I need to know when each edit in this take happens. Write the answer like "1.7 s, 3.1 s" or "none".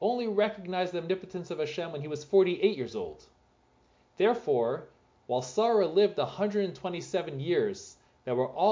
none

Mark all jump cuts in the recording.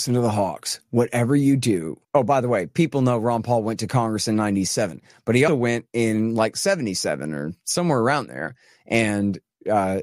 2.0 s, 5.5 s

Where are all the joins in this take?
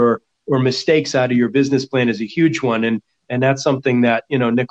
none

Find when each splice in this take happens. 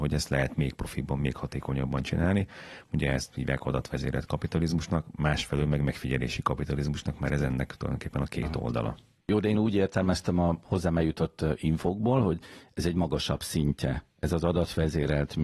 2.8 s

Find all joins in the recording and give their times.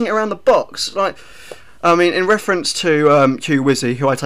none

